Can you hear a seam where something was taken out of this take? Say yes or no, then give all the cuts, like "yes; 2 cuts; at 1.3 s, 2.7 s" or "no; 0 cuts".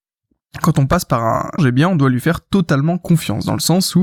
yes; 1 cut; at 1.6 s